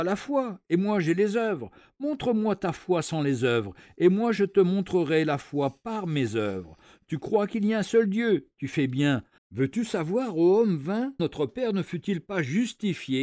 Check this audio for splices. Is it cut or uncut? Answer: cut